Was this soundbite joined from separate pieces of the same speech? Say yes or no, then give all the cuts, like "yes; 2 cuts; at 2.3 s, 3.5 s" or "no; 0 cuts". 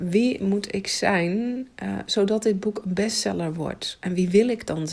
no; 0 cuts